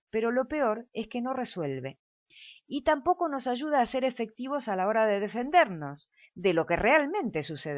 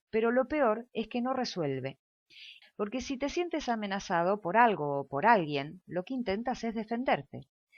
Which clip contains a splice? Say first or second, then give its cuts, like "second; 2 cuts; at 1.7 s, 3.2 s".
second; 1 cut; at 2.6 s